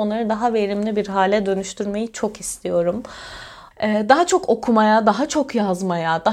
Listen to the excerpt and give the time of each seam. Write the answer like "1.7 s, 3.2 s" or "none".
3.7 s